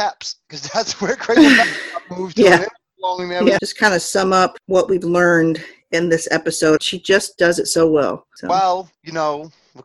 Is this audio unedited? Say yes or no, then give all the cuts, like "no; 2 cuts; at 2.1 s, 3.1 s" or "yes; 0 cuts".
no; 2 cuts; at 3.6 s, 6.8 s